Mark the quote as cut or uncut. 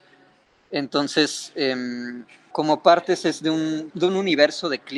cut